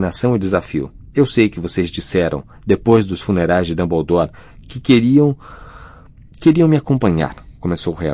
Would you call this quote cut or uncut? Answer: uncut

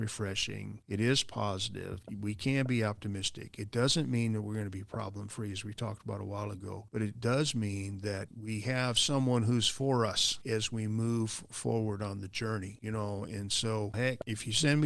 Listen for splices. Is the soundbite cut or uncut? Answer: uncut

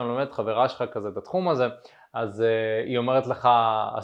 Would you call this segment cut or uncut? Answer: uncut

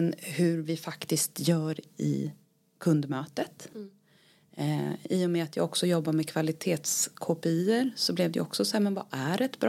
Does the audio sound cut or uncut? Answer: uncut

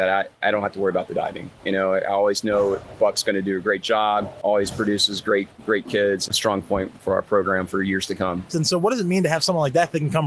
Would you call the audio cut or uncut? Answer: cut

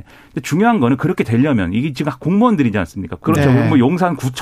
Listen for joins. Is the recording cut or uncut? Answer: cut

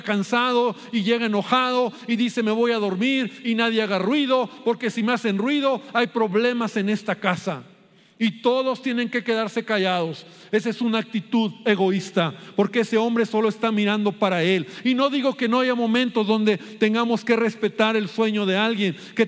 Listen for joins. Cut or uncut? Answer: uncut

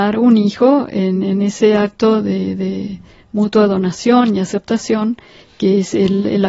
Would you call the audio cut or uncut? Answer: uncut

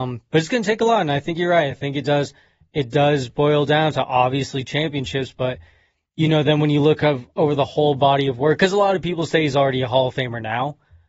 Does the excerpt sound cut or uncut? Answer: uncut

